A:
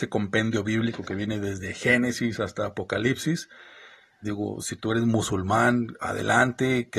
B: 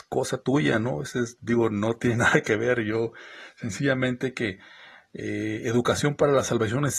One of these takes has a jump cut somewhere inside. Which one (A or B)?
A